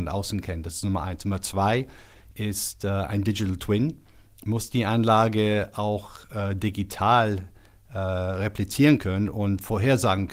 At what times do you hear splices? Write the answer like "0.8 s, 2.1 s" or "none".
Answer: none